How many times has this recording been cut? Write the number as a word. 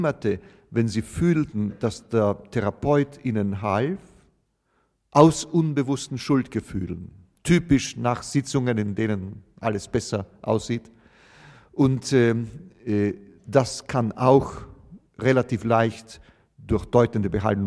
one